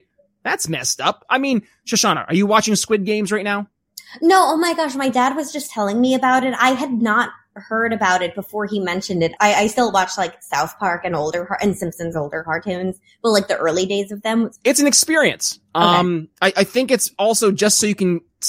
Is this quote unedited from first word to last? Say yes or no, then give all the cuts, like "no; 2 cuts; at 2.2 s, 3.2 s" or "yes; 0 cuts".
no; 2 cuts; at 9.4 s, 14.6 s